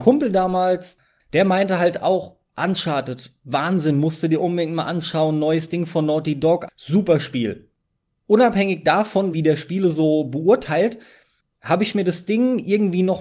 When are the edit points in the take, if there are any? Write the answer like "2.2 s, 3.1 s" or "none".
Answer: 6.7 s, 9.3 s